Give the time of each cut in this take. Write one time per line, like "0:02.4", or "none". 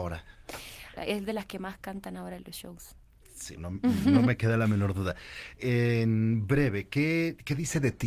0:01.0
0:03.6